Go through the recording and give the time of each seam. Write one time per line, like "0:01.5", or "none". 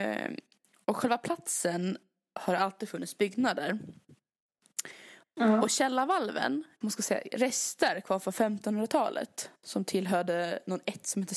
0:06.8